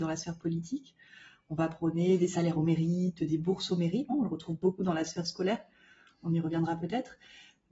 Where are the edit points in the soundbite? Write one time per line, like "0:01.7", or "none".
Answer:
0:04.1